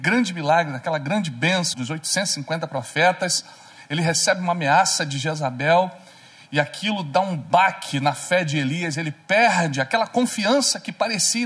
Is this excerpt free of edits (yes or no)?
no